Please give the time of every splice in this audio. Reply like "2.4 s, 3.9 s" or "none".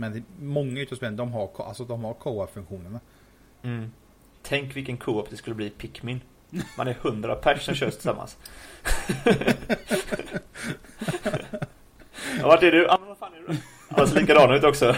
none